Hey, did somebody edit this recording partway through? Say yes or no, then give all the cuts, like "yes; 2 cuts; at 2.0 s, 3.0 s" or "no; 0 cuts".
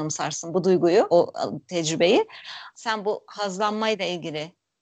yes; 2 cuts; at 1.1 s, 2.7 s